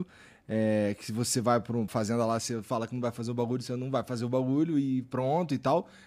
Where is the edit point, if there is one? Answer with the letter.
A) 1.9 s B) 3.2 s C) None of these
A